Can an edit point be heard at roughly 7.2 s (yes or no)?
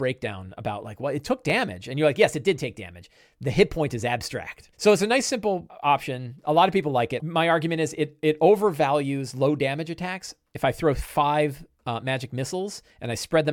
yes